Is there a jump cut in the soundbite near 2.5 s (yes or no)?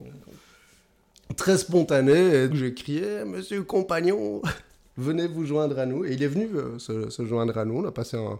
yes